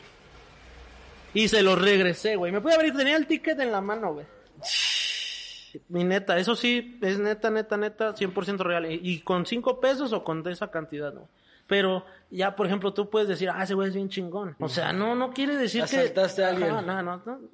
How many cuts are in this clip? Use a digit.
1